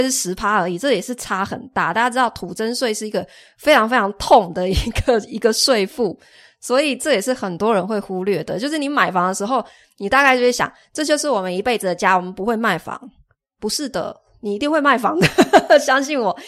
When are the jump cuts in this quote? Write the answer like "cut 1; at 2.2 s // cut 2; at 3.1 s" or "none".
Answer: none